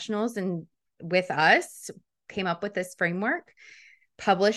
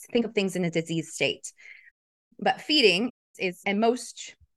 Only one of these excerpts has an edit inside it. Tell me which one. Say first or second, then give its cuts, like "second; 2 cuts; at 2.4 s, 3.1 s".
second; 1 cut; at 3.6 s